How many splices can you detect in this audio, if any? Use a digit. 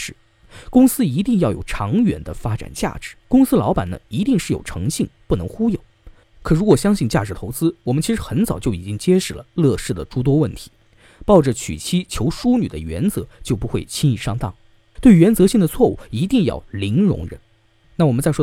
3